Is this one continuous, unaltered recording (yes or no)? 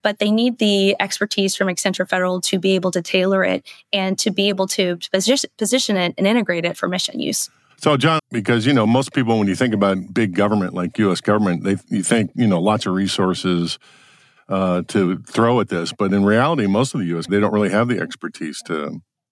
no